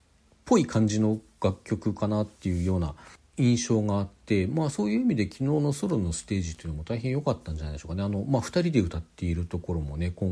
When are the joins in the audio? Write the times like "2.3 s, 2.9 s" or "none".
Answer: none